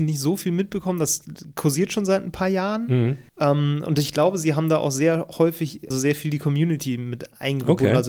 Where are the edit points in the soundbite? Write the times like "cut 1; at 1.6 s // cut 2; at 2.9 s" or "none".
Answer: cut 1; at 3.3 s // cut 2; at 5.9 s